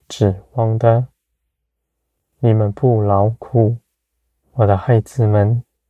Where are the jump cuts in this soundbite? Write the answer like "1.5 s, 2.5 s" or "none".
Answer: 4.4 s